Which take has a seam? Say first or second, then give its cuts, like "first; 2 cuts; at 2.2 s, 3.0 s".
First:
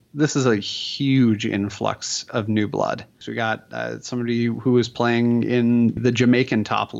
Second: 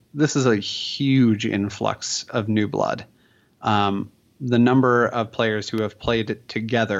first; 2 cuts; at 3.2 s, 6.0 s